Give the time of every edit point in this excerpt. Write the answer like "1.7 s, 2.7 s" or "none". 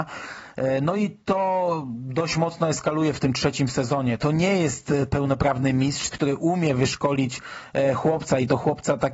4.2 s, 6.1 s